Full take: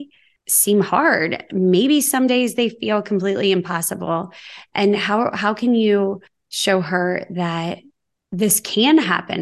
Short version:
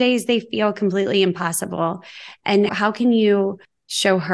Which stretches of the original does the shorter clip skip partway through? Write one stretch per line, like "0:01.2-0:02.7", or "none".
0:05.0-0:05.3